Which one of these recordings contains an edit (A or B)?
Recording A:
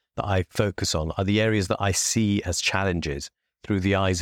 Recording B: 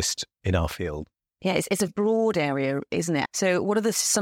B